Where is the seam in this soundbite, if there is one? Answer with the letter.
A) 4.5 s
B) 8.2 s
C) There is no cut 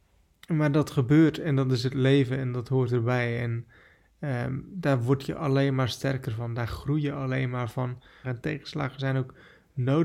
B